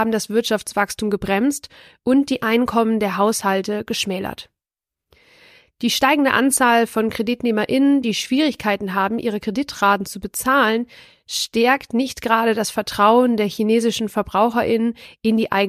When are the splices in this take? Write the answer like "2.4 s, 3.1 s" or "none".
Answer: none